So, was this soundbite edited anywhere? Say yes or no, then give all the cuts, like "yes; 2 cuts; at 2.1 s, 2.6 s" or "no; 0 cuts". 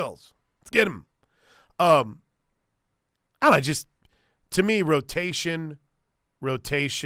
no; 0 cuts